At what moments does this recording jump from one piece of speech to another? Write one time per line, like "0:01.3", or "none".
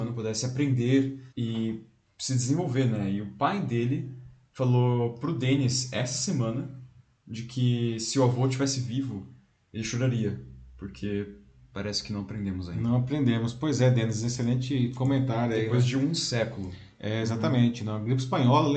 0:01.3